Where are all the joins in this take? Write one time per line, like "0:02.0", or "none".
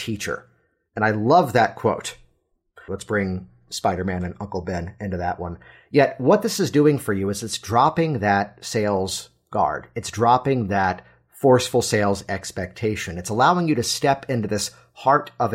0:02.9